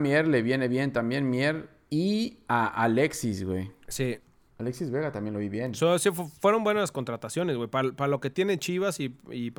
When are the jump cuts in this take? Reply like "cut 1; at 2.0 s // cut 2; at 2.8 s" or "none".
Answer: none